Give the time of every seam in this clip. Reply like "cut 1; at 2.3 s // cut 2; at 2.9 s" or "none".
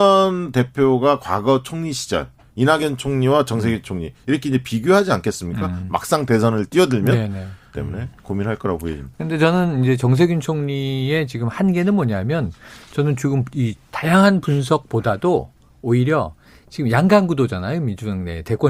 cut 1; at 7.7 s // cut 2; at 9.1 s